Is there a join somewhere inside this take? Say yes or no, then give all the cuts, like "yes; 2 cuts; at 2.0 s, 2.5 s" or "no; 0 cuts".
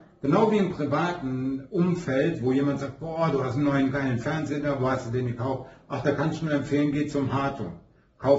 no; 0 cuts